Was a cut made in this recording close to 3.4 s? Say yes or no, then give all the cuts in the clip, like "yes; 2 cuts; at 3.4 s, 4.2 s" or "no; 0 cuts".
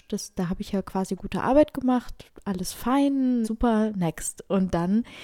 yes; 1 cut; at 3.4 s